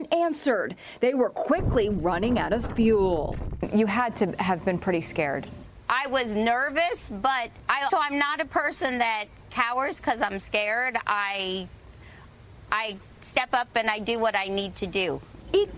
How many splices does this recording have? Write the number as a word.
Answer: one